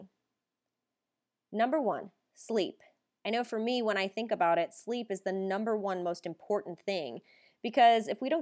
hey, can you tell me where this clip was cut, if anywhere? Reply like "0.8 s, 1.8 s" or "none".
none

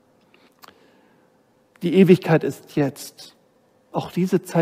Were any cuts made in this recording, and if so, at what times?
1.7 s

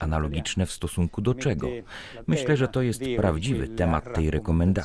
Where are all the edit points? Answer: 2.2 s

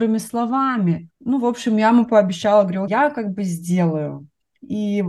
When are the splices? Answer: 1.1 s, 2.9 s

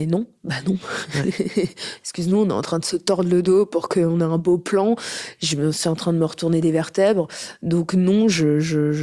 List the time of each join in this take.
none

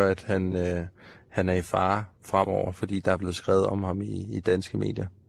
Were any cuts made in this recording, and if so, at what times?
none

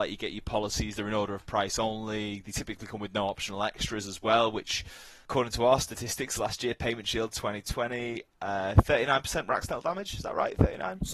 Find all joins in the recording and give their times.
none

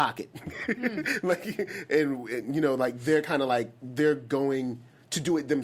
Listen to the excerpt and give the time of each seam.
none

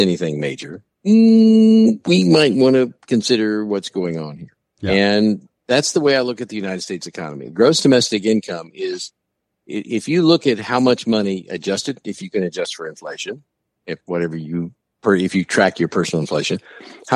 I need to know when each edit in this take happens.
none

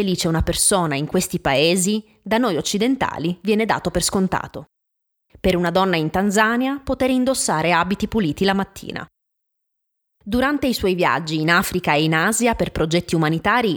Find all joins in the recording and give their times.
5.3 s, 10.1 s

